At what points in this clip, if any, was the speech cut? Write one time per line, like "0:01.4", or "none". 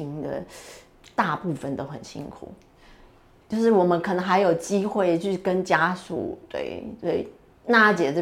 0:03.4